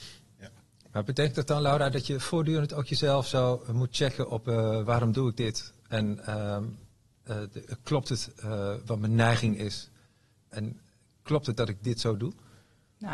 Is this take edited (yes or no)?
no